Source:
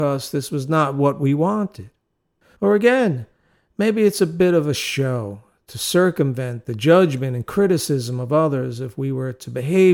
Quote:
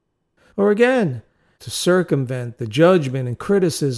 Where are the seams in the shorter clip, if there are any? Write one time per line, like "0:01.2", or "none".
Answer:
0:01.6